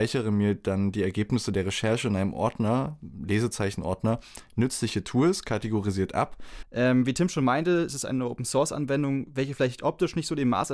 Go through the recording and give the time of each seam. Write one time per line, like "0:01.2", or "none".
0:06.6

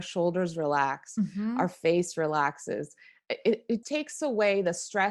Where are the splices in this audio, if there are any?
0:03.8

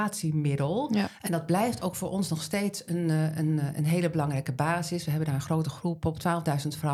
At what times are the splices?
0:01.2

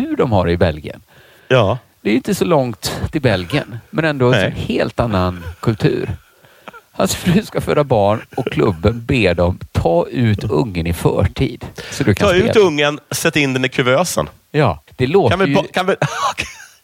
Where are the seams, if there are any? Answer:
0:14.9

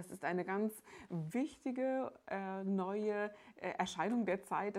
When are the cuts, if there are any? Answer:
none

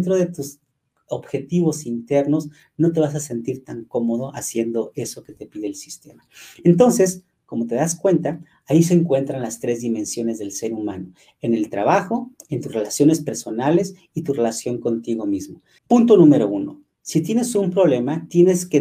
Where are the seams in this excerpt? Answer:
0:15.8

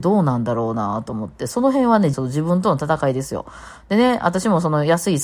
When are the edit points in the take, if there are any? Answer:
0:02.1

